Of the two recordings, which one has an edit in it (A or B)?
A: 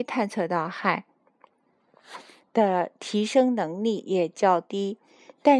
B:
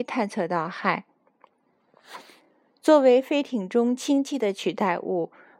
A